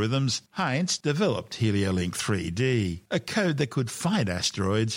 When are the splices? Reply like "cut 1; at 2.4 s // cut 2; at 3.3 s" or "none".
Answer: cut 1; at 1.0 s